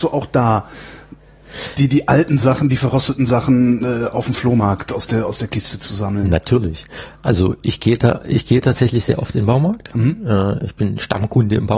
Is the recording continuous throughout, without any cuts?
yes; 0 cuts

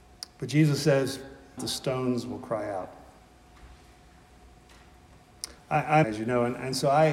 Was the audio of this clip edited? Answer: yes; 2 cuts; at 1.6 s, 6.0 s

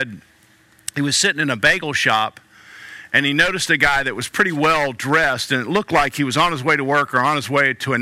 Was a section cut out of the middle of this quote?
no; 0 cuts

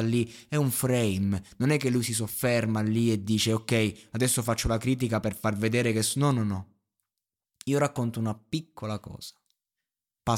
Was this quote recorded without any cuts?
yes; 0 cuts

